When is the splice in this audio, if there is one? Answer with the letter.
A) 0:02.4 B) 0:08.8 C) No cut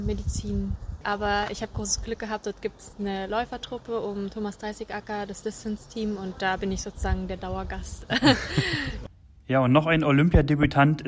C